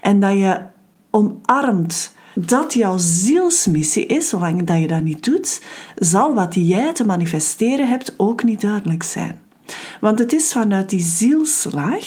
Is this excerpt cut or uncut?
cut